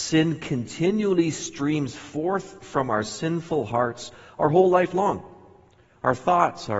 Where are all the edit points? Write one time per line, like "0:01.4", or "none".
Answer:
none